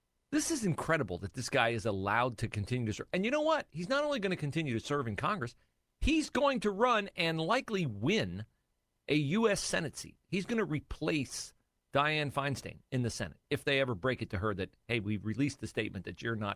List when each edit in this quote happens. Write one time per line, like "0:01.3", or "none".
none